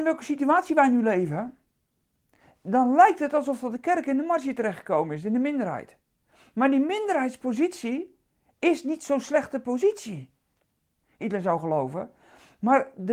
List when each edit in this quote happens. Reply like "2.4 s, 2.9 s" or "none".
11.2 s